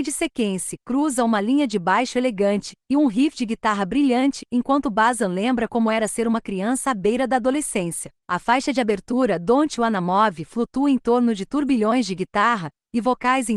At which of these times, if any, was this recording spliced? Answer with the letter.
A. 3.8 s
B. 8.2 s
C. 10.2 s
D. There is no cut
B